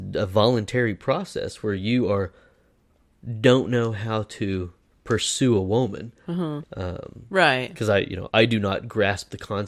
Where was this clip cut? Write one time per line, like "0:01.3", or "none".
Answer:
0:06.6
0:08.3